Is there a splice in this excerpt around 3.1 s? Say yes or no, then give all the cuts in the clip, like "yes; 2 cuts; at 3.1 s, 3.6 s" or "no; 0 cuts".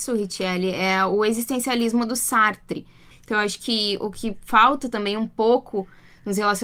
yes; 1 cut; at 3.1 s